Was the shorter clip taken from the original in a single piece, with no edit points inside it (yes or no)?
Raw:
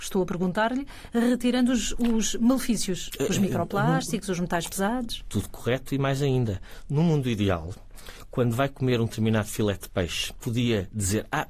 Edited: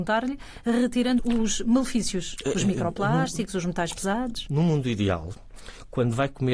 no